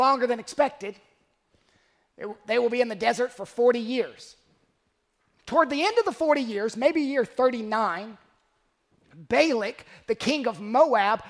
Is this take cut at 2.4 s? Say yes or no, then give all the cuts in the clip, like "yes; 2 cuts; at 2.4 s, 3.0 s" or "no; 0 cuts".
no; 0 cuts